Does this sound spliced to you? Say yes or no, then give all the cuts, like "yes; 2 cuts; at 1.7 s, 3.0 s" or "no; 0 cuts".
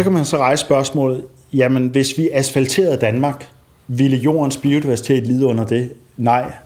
no; 0 cuts